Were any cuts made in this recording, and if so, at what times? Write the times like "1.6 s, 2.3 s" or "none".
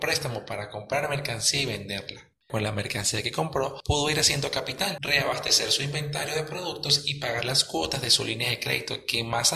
none